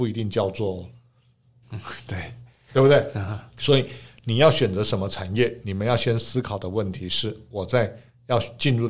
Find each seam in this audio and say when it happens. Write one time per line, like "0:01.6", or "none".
0:01.6
0:03.6